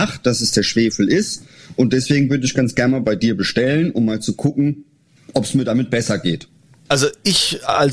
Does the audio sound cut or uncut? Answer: cut